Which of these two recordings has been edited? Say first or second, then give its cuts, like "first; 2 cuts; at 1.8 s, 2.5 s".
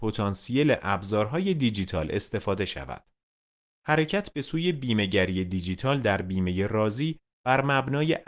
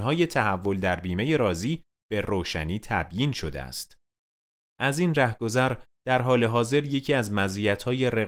first; 1 cut; at 3.7 s